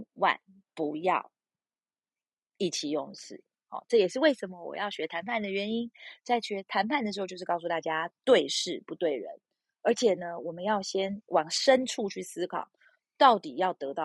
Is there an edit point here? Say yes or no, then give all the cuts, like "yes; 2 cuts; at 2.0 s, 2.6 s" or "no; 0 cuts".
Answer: no; 0 cuts